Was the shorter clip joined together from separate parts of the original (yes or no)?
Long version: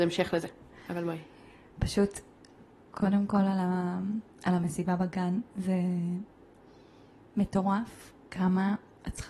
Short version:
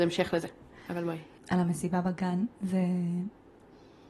yes